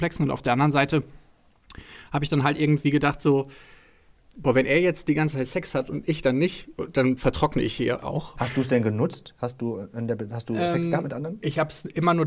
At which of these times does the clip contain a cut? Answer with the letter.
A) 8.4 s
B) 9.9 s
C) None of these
A